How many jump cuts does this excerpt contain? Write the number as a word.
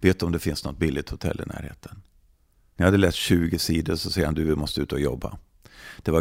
one